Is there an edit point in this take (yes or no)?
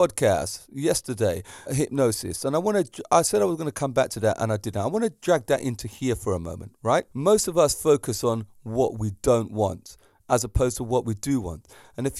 yes